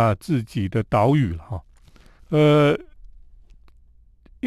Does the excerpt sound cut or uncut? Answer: cut